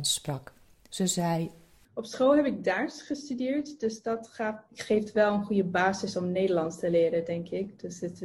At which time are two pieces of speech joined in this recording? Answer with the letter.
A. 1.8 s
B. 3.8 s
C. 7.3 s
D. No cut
D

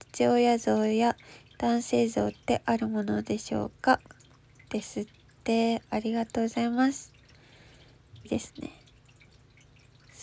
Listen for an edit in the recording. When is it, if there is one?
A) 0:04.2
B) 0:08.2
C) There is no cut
B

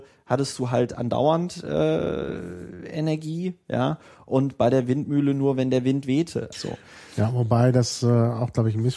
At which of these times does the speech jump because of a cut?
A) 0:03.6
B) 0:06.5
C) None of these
B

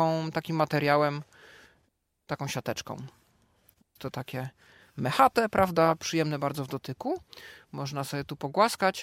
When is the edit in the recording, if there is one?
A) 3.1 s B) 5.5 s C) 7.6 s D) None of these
D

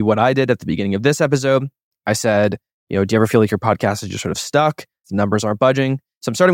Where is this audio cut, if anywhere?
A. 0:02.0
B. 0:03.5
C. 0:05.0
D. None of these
C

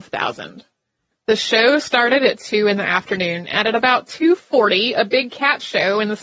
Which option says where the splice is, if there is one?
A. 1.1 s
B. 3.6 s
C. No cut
A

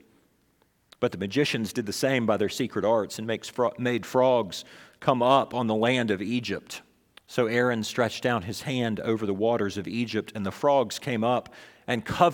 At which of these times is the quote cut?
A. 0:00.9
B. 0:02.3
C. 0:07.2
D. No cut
C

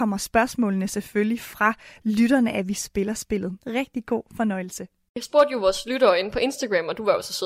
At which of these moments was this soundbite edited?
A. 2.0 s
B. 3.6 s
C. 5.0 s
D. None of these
B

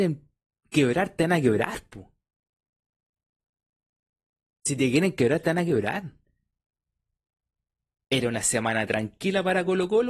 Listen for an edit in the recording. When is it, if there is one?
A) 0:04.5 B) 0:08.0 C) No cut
B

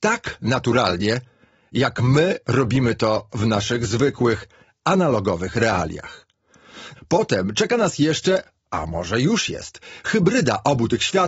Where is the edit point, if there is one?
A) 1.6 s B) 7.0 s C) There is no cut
B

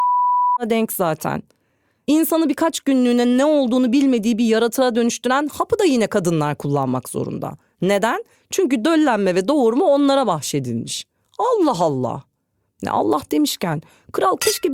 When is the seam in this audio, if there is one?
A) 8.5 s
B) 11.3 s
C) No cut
C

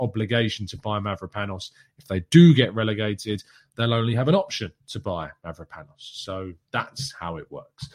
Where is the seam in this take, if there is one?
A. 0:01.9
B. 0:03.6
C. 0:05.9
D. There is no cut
D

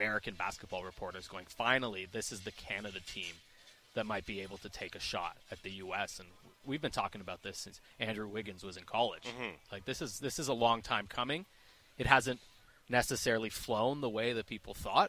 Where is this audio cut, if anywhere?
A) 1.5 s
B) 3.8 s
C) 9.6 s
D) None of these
C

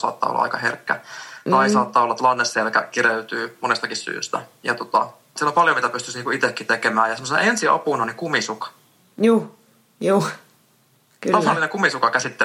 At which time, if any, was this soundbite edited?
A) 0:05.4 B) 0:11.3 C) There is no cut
A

